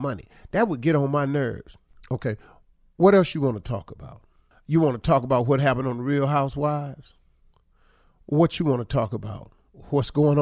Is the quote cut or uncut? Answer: uncut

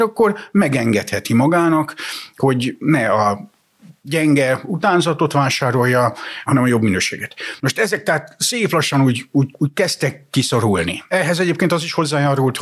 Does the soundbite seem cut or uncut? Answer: cut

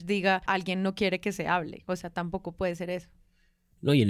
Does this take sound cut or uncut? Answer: uncut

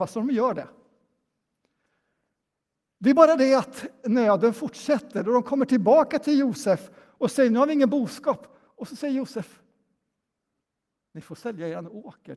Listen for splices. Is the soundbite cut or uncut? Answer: uncut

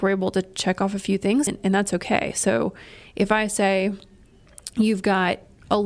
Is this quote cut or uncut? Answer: cut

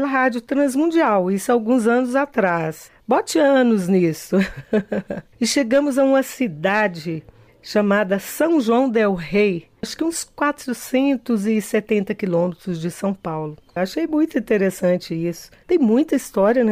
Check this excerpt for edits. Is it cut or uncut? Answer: cut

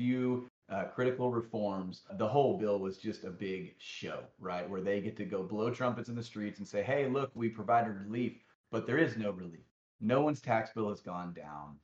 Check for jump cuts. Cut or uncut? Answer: cut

